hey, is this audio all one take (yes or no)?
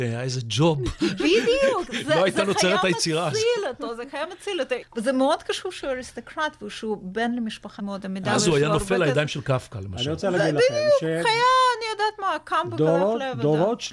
no